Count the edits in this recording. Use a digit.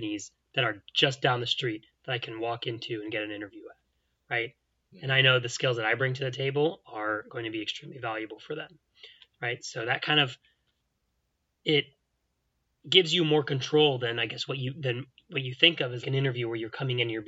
2